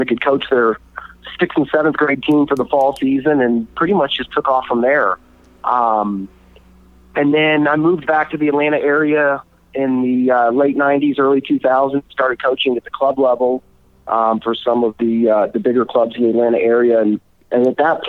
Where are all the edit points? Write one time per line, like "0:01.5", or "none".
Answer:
none